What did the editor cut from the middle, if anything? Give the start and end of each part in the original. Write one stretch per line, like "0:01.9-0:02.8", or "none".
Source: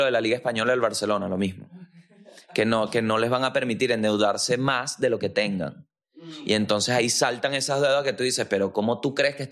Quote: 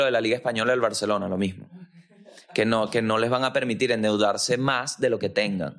none